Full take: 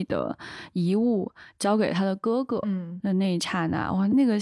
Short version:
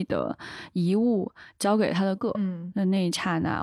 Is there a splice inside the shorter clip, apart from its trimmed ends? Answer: yes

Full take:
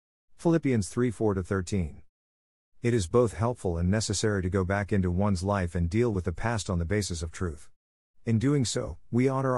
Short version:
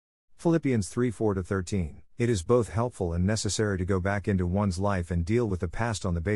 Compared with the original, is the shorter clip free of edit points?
no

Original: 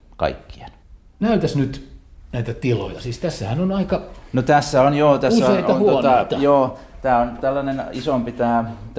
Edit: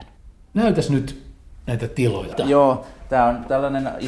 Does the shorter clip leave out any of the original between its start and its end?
yes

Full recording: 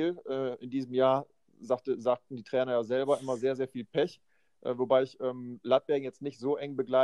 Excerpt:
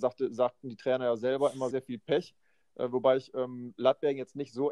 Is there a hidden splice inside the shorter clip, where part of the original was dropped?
yes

